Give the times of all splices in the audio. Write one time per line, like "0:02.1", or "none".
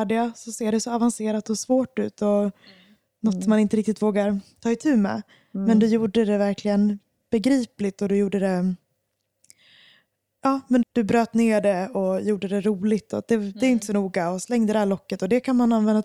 0:10.8